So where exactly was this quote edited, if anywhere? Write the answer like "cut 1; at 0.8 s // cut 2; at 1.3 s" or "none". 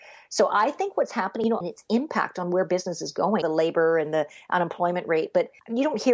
cut 1; at 1.6 s // cut 2; at 3.4 s